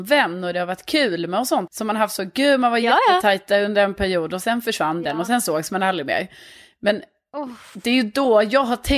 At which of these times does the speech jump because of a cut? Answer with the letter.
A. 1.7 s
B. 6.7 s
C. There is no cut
A